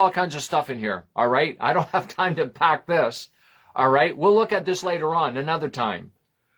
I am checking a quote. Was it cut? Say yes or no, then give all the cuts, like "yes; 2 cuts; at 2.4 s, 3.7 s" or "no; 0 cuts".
no; 0 cuts